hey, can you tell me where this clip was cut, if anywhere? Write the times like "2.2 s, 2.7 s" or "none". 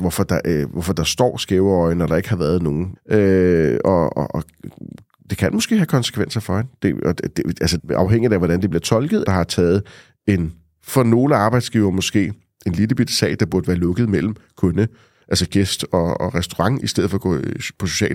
3.0 s, 7.8 s, 9.2 s